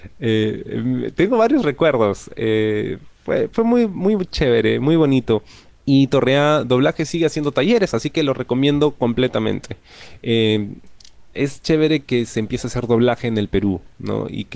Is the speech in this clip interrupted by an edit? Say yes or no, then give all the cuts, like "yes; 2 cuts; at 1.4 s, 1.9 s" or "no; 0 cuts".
yes; 1 cut; at 5.8 s